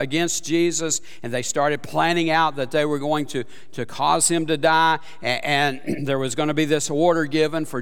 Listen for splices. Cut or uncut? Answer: uncut